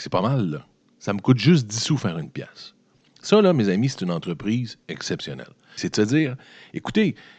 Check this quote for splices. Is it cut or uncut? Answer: cut